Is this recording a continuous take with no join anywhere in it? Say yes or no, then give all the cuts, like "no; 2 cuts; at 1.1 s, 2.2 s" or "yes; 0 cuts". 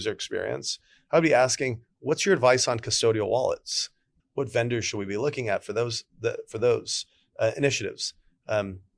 no; 1 cut; at 4.2 s